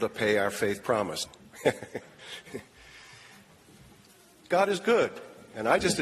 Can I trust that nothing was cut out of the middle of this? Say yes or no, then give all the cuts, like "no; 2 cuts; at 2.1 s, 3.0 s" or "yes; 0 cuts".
no; 1 cut; at 1.3 s